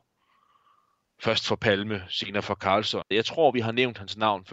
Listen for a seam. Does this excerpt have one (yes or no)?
yes